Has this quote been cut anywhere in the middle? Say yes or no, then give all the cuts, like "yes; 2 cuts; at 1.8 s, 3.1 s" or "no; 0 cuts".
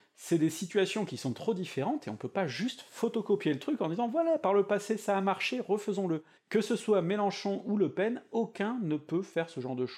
yes; 1 cut; at 6.4 s